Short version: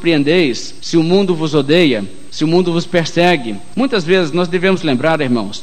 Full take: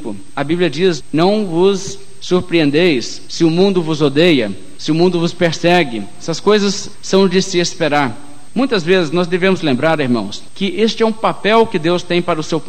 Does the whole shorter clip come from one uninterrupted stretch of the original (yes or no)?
no